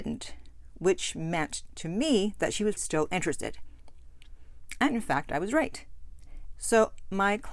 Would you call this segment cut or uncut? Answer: cut